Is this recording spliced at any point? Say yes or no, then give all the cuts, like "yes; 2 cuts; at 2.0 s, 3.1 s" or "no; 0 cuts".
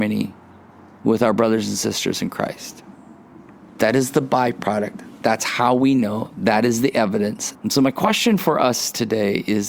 yes; 1 cut; at 7.5 s